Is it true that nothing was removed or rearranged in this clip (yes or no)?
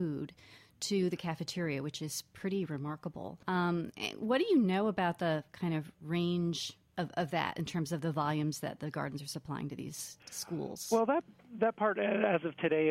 no